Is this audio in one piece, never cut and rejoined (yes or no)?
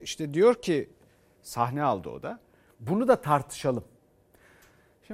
no